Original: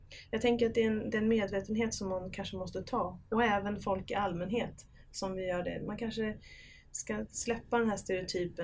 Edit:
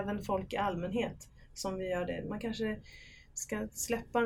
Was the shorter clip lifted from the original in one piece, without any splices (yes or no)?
yes